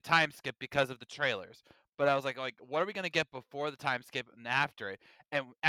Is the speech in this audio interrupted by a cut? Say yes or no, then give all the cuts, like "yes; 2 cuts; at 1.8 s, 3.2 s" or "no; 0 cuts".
no; 0 cuts